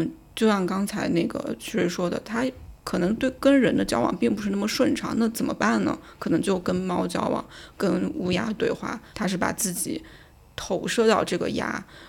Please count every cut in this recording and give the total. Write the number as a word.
one